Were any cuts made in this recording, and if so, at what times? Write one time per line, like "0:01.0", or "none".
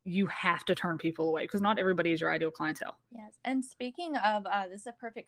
0:03.0